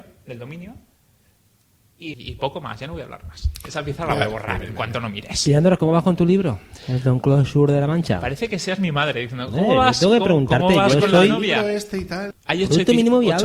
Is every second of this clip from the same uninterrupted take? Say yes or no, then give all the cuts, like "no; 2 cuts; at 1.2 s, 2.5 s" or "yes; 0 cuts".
no; 2 cuts; at 2.1 s, 12.3 s